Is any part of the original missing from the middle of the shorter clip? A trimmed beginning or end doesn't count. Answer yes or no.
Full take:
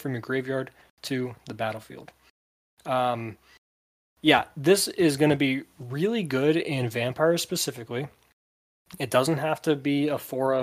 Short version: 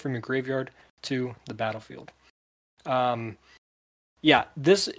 no